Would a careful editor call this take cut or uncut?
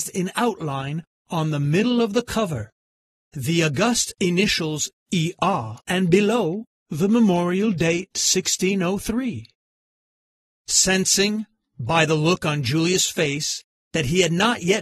cut